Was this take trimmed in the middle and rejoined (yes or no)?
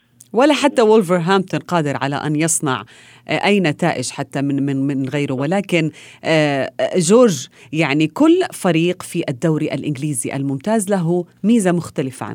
no